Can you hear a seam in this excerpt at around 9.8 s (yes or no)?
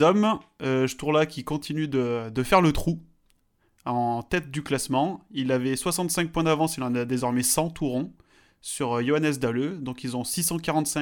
no